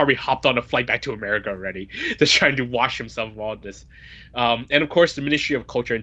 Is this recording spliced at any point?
no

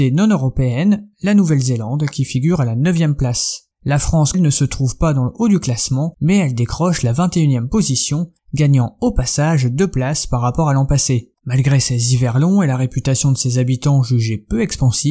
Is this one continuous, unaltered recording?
no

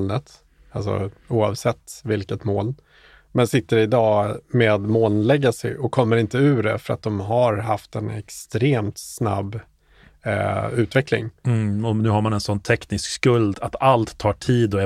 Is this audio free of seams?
no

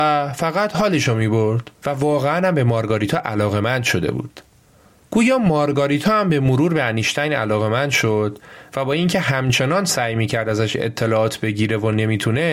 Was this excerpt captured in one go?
no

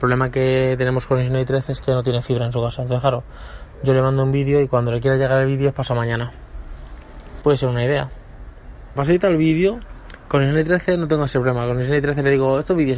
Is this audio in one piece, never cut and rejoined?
no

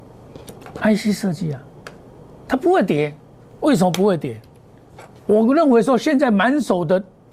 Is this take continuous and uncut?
no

